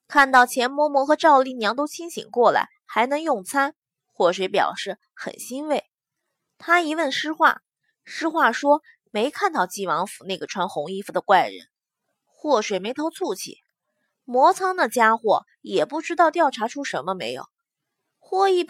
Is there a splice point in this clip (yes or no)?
no